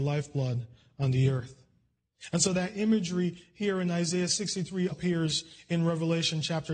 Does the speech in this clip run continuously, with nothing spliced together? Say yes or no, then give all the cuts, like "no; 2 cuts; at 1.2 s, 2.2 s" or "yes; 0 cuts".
no; 1 cut; at 4.9 s